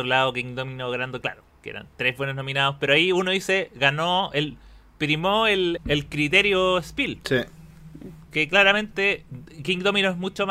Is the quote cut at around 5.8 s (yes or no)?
yes